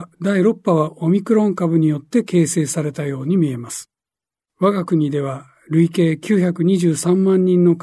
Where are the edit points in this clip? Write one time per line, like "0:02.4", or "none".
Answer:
0:04.4